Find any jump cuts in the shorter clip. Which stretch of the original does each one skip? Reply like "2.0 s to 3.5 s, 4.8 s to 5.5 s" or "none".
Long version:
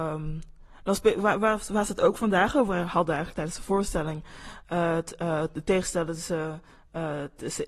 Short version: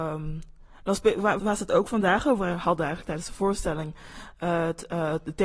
1.4 s to 1.7 s